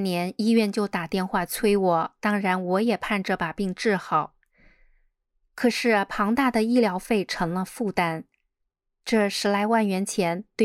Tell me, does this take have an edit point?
no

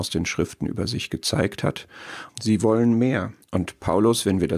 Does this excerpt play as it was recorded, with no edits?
no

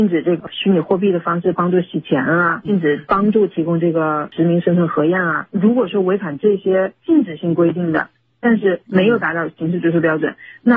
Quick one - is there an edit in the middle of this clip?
no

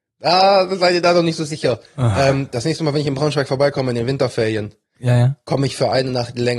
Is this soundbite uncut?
yes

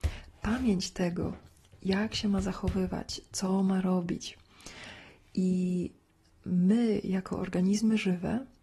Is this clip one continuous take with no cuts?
yes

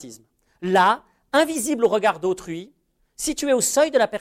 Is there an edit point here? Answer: no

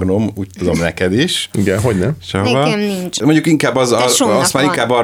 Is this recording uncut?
yes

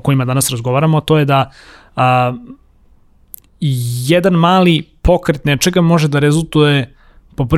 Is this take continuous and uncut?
yes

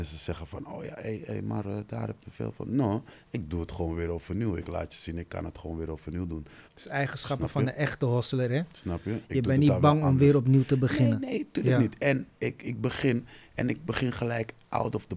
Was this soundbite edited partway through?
yes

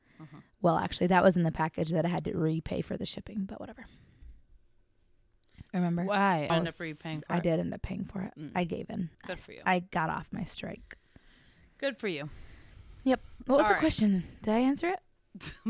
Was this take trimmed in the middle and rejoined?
yes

